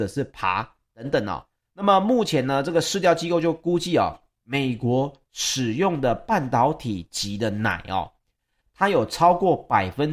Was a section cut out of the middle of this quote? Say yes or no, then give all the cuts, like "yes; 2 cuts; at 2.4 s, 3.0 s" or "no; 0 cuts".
no; 0 cuts